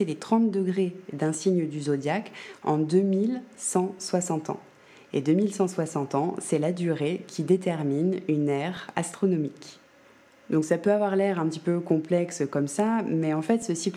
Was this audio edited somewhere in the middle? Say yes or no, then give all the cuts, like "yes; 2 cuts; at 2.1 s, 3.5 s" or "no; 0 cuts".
no; 0 cuts